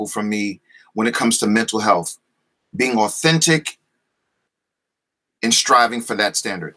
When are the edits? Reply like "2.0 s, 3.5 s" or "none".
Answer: 5.3 s